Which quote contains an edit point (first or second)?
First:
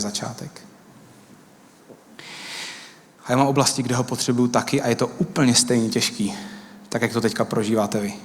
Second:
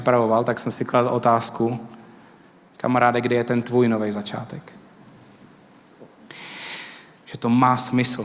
second